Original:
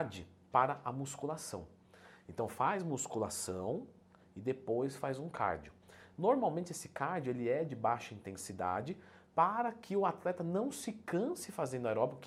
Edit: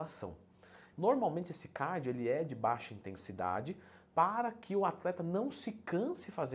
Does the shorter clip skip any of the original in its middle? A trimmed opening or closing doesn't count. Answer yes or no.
yes